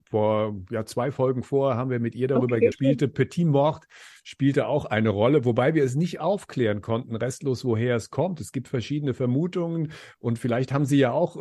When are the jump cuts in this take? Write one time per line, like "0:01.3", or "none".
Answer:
0:02.7